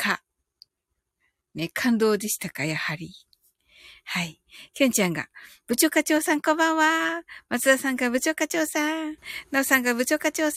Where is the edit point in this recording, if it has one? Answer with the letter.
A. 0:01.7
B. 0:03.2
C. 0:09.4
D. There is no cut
D